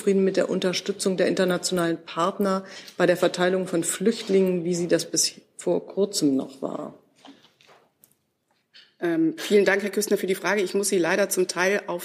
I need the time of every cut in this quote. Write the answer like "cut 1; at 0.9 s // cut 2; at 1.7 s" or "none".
none